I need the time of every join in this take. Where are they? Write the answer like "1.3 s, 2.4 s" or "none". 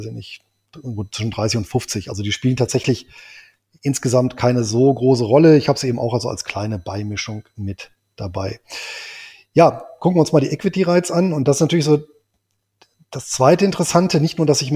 none